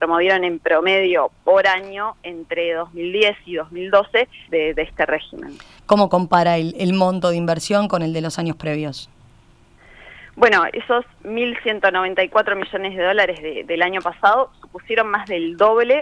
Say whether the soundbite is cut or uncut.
cut